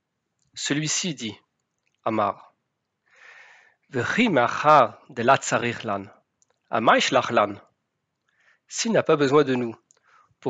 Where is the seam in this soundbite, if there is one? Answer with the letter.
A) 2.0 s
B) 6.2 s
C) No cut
C